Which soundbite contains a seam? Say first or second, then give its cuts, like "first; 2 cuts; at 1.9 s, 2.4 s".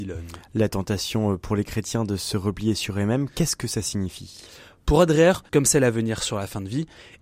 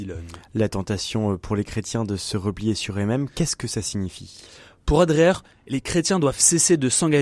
first; 1 cut; at 5.5 s